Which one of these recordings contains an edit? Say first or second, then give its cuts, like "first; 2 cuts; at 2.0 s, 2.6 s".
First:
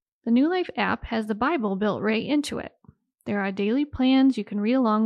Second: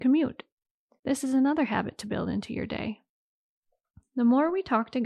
second; 1 cut; at 1.0 s